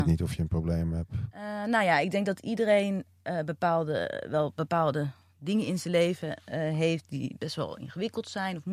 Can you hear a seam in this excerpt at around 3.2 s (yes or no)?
no